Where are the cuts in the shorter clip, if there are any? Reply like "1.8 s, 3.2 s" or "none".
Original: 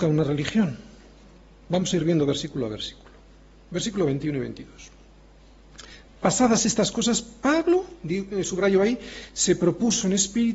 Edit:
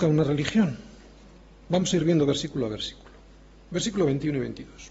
none